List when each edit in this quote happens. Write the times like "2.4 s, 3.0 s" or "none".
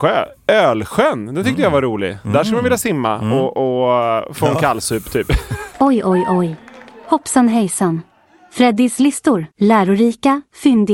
5.7 s, 9.5 s